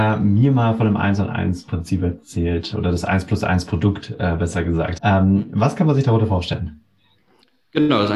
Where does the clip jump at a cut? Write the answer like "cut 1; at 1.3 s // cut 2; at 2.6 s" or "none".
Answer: cut 1; at 5.0 s